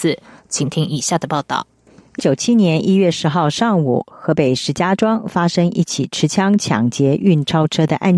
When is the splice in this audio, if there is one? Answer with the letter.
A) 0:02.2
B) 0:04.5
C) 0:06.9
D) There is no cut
A